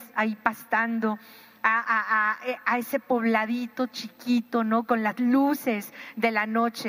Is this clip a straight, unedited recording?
yes; 0 cuts

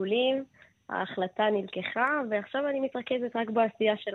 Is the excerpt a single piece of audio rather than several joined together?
yes; 0 cuts

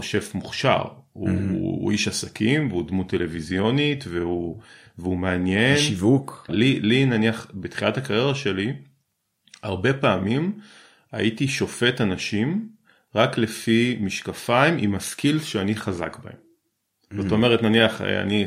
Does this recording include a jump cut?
yes; 1 cut; at 6.5 s

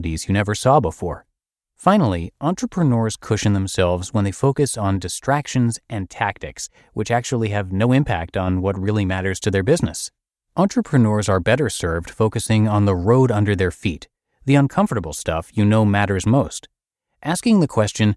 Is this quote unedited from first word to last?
yes; 0 cuts

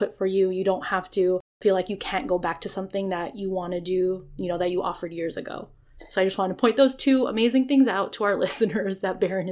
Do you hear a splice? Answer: no; 0 cuts

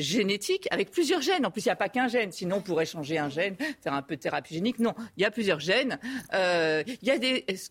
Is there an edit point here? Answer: no; 0 cuts

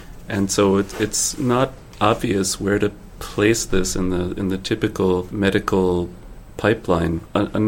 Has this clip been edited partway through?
no; 0 cuts

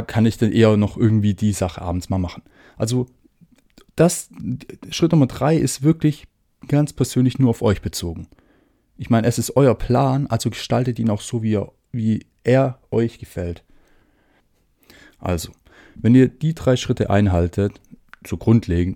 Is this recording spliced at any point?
no; 0 cuts

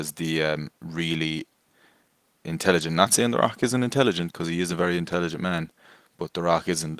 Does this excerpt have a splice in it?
no; 0 cuts

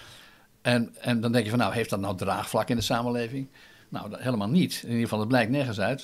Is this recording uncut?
yes; 0 cuts

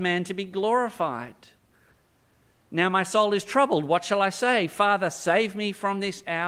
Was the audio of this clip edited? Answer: no; 0 cuts

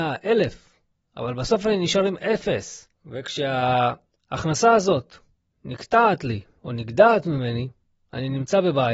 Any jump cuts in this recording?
no; 0 cuts

